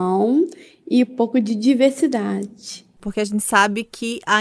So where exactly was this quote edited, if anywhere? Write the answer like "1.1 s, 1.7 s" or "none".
3.0 s